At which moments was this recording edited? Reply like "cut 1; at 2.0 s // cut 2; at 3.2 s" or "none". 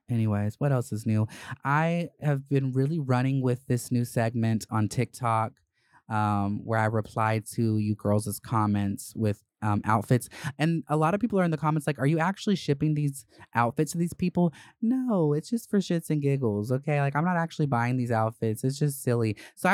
none